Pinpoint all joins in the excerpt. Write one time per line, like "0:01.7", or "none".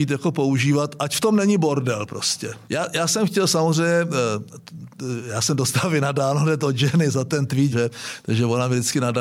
0:02.6
0:07.7